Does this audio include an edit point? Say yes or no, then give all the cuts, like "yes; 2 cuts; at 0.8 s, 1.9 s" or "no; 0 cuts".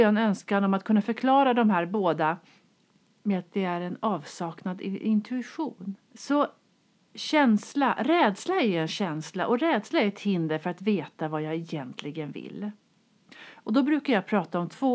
yes; 1 cut; at 6.0 s